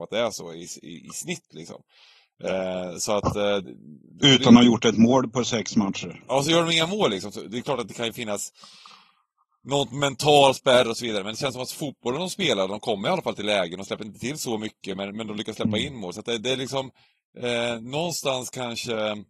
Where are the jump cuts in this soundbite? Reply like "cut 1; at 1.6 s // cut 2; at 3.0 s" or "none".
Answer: none

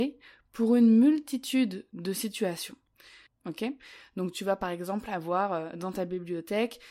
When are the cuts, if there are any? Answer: cut 1; at 3.3 s

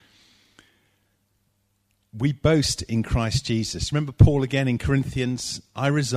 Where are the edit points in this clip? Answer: none

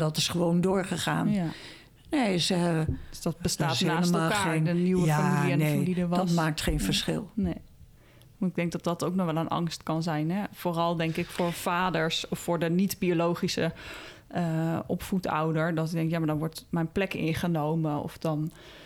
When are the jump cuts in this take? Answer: none

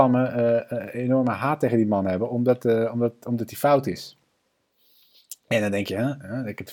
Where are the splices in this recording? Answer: none

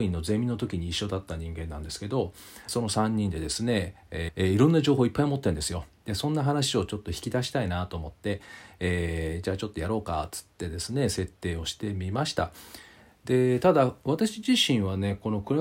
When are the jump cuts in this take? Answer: cut 1; at 2.7 s // cut 2; at 4.3 s

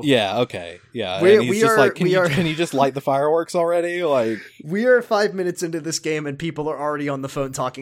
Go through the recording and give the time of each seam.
none

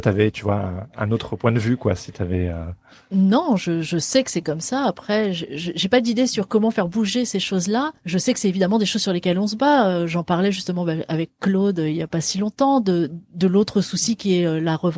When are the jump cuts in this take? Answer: none

